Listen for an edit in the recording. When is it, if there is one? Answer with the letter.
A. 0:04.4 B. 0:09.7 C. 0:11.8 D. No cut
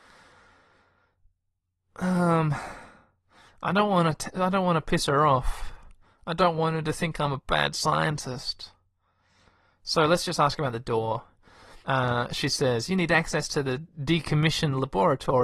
C